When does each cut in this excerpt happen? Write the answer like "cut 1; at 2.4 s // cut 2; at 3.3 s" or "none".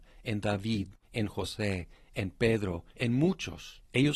cut 1; at 1.0 s // cut 2; at 2.9 s